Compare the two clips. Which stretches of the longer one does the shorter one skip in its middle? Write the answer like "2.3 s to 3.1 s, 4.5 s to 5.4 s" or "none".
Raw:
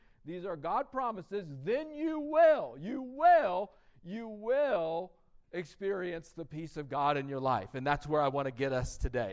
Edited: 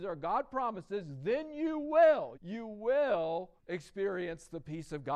2.7 s to 4.0 s, 5.2 s to 5.4 s